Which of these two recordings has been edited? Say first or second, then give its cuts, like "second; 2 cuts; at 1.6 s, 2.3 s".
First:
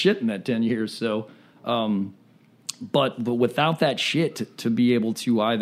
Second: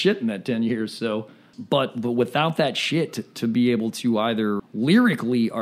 second; 2 cuts; at 1.5 s, 4.6 s